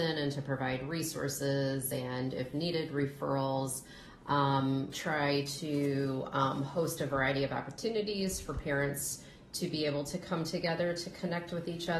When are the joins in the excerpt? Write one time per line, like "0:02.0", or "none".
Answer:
0:04.9